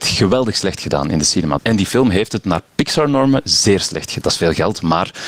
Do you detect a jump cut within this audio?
yes; 2 cuts; at 1.6 s, 4.2 s

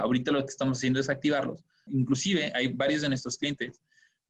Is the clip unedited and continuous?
no; 1 cut; at 1.9 s

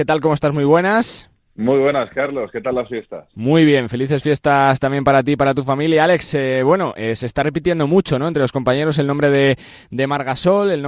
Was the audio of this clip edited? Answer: no; 0 cuts

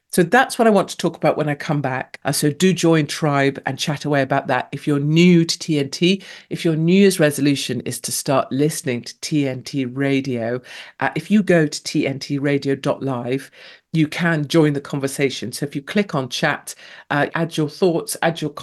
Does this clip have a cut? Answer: yes; 2 cuts; at 2.2 s, 17.3 s

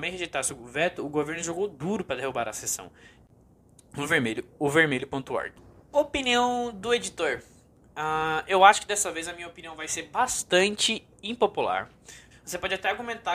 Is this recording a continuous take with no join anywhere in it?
no; 1 cut; at 12.3 s

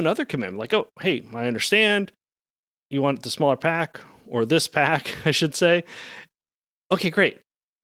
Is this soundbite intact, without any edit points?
yes; 0 cuts

